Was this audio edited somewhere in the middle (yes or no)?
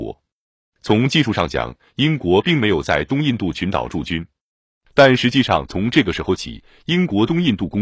no